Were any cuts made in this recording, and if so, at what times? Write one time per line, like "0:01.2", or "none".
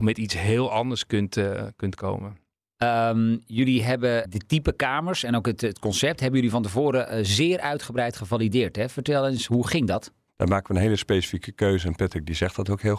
0:10.3